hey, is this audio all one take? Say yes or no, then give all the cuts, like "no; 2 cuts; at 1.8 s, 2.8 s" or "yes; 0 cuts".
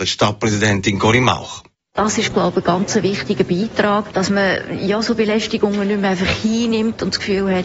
yes; 0 cuts